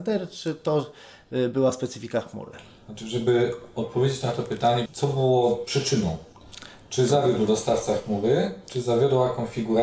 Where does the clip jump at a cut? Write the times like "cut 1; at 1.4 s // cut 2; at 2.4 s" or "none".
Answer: cut 1; at 4.9 s